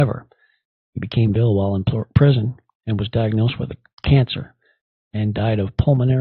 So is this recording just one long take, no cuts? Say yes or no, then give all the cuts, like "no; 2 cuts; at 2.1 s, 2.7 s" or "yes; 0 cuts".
no; 1 cut; at 1.3 s